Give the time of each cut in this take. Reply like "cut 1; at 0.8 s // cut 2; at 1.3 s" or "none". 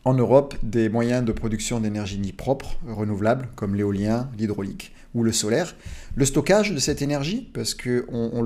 none